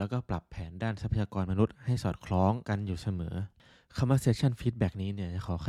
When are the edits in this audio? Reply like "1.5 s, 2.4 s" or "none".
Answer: none